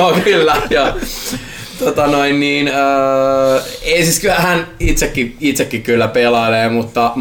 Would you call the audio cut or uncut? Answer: uncut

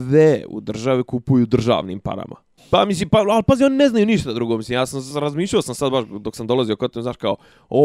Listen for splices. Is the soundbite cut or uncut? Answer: cut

